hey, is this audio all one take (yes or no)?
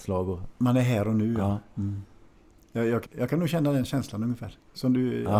no